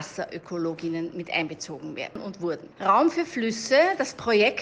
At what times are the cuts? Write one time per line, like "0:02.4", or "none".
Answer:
0:02.7